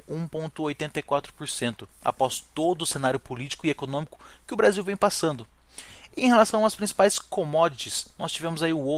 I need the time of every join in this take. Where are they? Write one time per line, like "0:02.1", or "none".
none